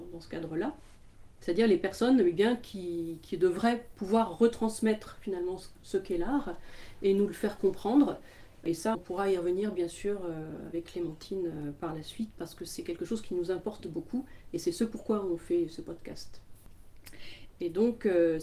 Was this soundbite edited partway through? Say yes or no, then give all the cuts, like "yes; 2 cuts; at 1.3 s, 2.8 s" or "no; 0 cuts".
yes; 2 cuts; at 8.9 s, 17.5 s